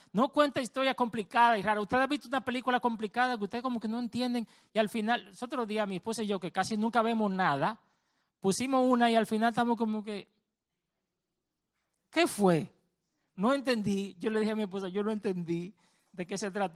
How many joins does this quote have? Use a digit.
0